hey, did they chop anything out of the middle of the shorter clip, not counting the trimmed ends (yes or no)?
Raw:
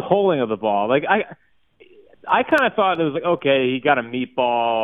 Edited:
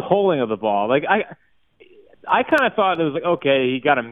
no